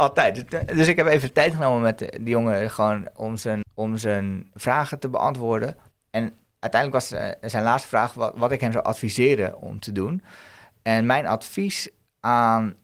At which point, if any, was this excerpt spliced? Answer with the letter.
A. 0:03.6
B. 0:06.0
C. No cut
A